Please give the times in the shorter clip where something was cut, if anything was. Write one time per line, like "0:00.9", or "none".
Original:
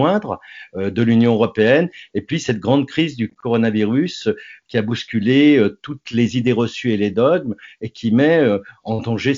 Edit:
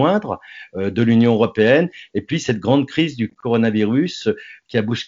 none